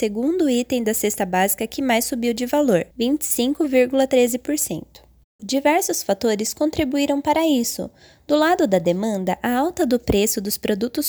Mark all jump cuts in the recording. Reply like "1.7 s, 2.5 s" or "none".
2.9 s, 5.4 s